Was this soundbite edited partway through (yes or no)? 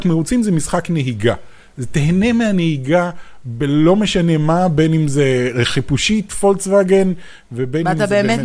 no